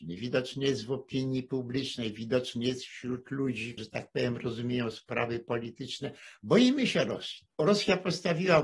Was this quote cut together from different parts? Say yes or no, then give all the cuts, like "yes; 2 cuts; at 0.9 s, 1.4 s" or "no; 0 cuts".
yes; 2 cuts; at 3.8 s, 7.6 s